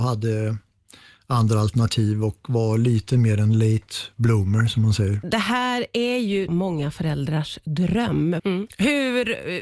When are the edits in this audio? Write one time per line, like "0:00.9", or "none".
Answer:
0:05.2
0:06.5
0:08.4